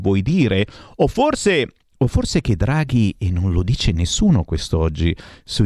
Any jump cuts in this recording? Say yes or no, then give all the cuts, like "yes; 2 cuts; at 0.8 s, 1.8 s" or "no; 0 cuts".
no; 0 cuts